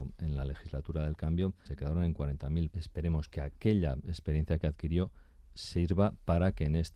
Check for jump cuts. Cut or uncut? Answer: cut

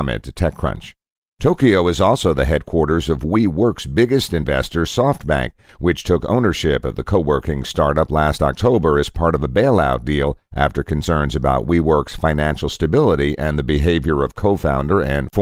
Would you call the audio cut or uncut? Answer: uncut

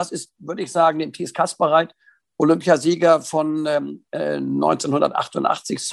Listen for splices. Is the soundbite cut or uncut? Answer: uncut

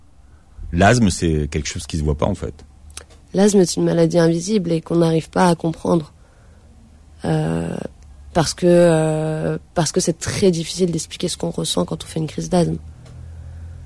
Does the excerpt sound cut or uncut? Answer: uncut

